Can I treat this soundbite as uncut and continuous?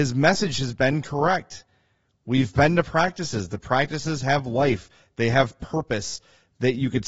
yes; 0 cuts

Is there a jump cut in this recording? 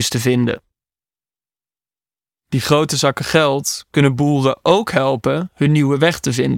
no; 0 cuts

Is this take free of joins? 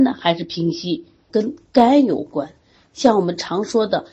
no; 1 cut; at 1.3 s

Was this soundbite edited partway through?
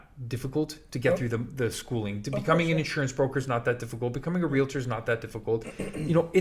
no; 0 cuts

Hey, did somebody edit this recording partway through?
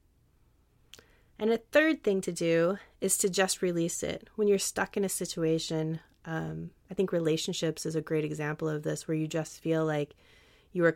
no; 0 cuts

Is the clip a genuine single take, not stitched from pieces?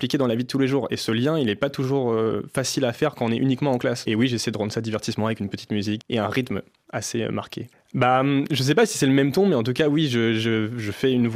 no; 3 cuts; at 4.1 s, 6.0 s, 7.7 s

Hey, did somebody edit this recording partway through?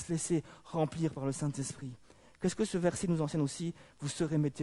no; 0 cuts

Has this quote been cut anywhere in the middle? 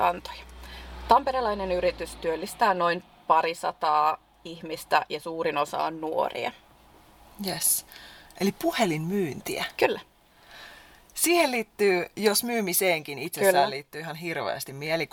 no; 0 cuts

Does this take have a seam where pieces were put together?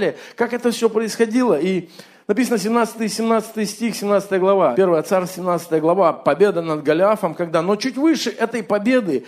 yes; 1 cut; at 4.7 s

